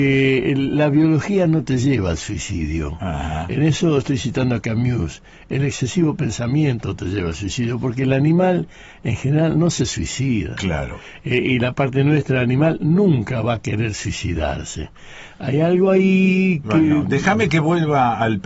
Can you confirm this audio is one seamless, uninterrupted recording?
yes; 0 cuts

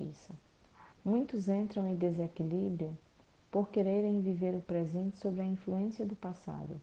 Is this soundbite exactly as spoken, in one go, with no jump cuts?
no; 1 cut; at 0.9 s

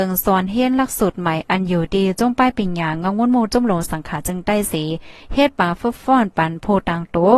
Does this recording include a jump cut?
no; 0 cuts

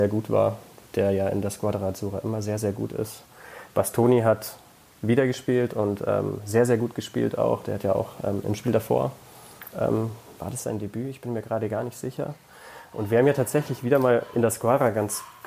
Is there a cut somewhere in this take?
no; 0 cuts

